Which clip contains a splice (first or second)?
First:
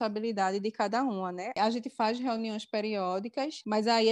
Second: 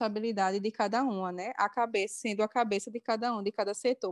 first